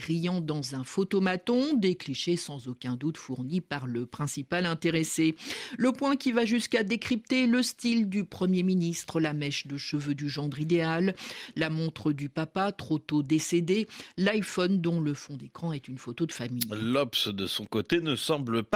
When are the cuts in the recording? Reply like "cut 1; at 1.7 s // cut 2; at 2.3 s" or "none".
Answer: none